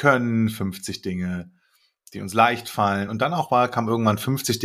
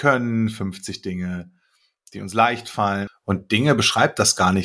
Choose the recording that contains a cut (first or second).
second